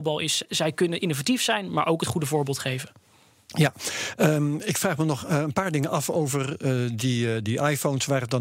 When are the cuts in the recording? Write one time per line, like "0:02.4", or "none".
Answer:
none